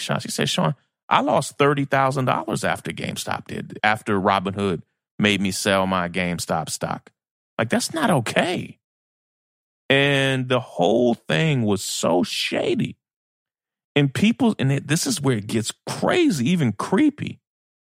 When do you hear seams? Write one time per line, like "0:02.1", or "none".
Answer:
0:03.8